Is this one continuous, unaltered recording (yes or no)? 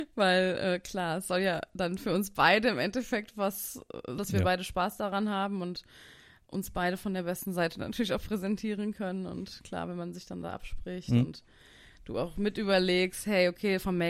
no